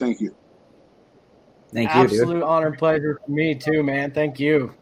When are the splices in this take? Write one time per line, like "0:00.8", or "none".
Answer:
none